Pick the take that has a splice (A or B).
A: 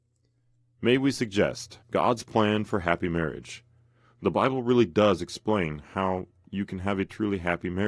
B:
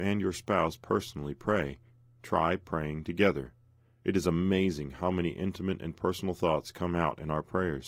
A